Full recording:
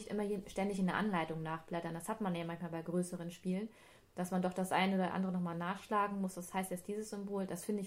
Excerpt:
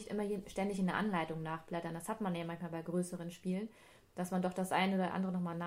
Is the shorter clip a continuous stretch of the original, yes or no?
yes